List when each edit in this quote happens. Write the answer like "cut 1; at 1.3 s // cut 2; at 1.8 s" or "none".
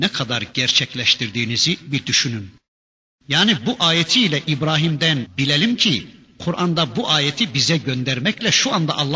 cut 1; at 5.3 s